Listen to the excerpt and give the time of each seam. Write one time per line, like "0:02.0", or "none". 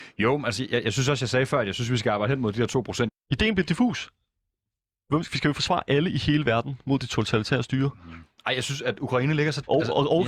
0:03.1